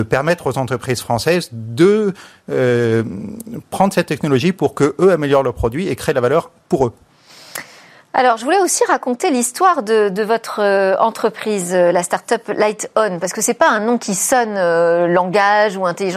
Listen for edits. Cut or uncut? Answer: uncut